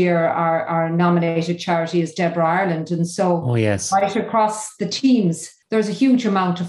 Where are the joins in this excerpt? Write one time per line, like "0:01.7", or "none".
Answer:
none